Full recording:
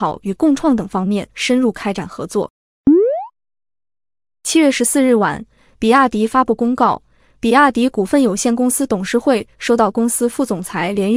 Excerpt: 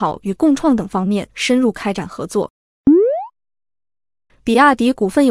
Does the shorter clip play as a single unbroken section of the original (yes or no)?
no